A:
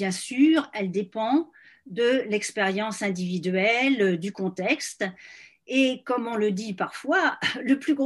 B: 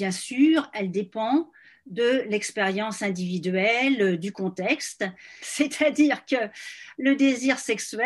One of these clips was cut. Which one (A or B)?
B